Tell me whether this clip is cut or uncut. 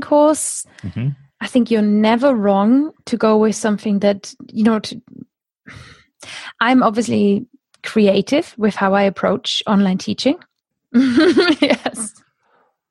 cut